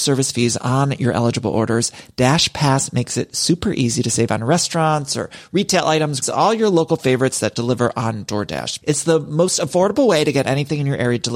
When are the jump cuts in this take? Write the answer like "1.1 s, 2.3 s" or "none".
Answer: 6.2 s, 8.8 s

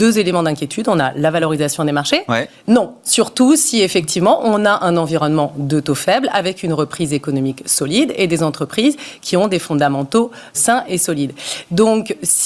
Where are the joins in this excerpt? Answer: 2.6 s, 10.5 s

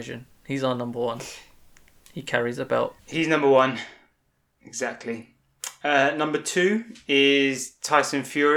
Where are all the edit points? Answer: 3.0 s

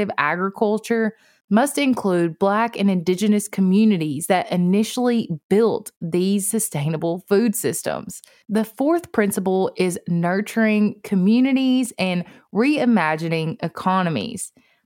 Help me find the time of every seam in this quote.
8.4 s

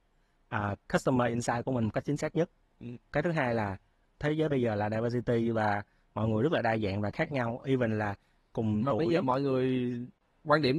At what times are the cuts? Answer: none

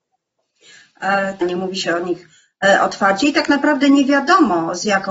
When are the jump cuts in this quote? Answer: 1.4 s

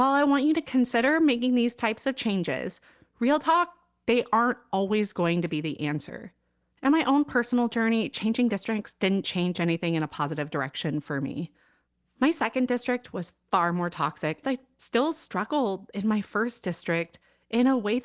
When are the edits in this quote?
14.4 s

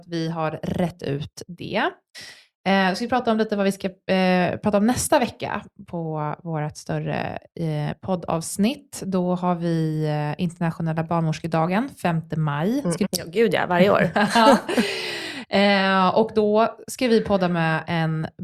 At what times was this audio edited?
13.0 s

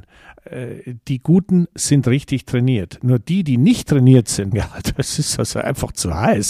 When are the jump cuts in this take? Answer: 4.5 s

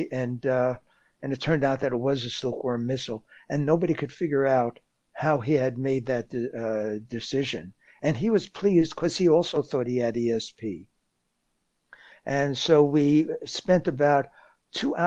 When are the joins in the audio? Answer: none

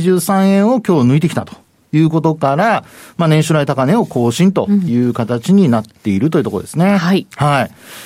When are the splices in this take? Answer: none

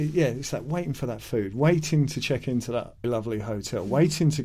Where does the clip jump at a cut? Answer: 3.0 s

